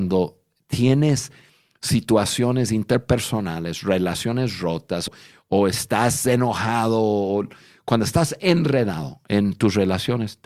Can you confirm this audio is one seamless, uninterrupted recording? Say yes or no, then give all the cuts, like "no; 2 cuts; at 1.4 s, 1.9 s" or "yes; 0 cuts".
no; 1 cut; at 5.1 s